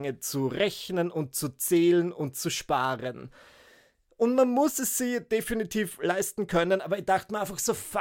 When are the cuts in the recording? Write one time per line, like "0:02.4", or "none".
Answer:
none